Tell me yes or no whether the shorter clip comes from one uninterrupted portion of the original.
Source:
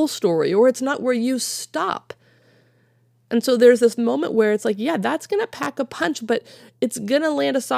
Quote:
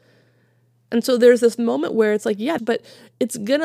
no